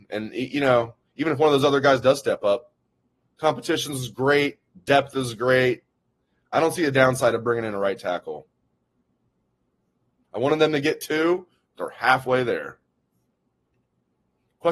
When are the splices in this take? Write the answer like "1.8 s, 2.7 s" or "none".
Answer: none